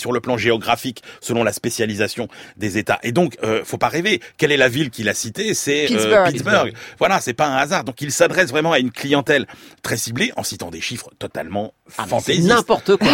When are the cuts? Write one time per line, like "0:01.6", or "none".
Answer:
none